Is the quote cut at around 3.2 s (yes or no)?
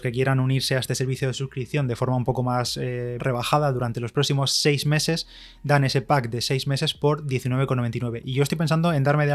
yes